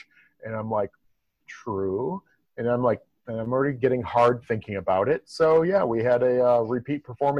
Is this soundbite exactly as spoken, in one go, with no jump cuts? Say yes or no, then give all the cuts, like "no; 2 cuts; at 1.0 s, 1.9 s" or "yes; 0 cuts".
yes; 0 cuts